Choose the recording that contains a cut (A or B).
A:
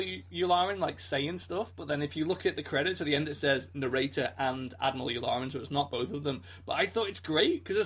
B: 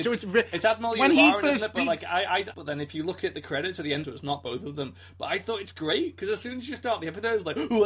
B